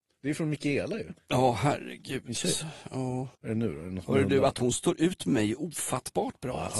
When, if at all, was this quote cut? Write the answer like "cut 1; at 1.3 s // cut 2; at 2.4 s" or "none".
cut 1; at 3.3 s